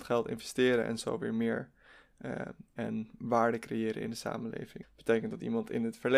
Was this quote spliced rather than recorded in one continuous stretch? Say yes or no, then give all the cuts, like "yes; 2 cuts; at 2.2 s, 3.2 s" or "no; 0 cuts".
yes; 2 cuts; at 2.8 s, 4.8 s